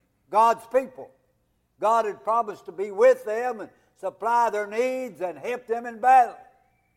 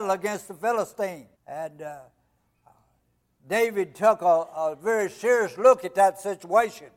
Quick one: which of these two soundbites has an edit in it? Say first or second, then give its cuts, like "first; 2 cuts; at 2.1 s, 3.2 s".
second; 1 cut; at 1.3 s